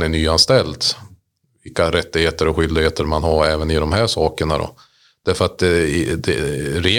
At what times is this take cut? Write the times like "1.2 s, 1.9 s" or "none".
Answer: none